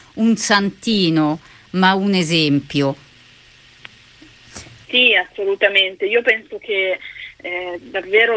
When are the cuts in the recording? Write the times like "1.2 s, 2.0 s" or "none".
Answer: 4.8 s